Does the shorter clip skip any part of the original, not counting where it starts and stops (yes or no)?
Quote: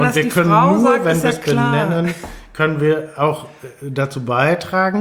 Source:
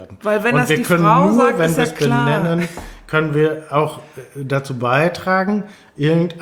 no